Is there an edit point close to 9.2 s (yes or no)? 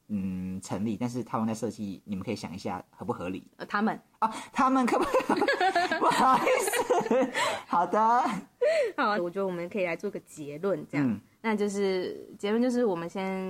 yes